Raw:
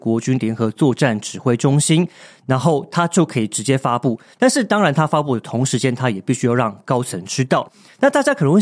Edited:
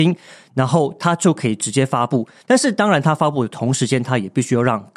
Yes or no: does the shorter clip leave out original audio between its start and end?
no